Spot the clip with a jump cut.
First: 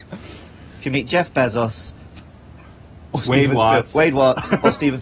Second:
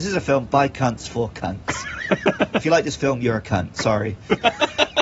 first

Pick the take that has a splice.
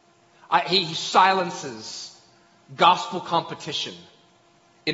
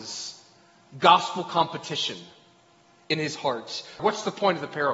second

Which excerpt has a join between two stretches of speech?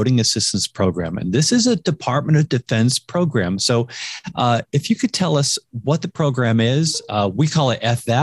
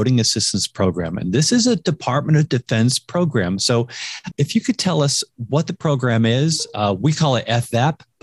second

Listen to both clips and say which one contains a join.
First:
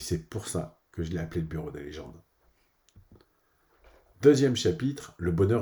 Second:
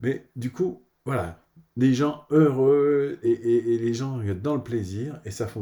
second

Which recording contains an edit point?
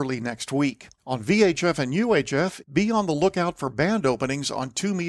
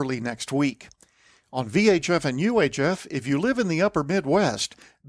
first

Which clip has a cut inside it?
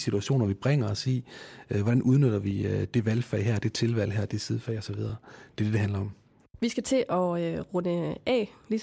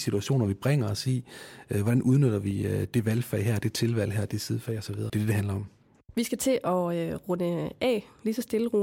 second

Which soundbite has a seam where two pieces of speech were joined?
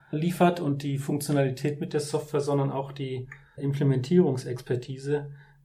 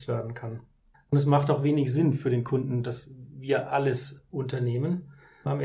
second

